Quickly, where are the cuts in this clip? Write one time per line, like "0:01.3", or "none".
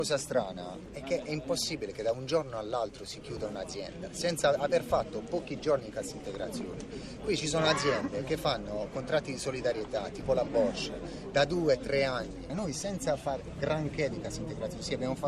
none